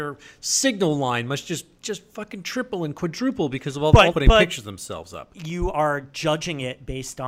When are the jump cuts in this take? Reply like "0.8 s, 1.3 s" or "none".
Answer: 4.1 s